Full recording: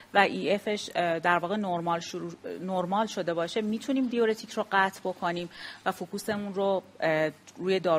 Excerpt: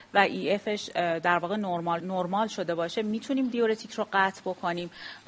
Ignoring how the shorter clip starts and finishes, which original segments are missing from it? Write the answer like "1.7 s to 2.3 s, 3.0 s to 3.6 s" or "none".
2.0 s to 2.6 s